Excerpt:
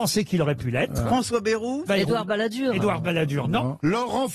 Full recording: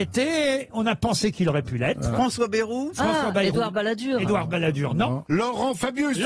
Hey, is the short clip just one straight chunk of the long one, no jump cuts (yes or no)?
no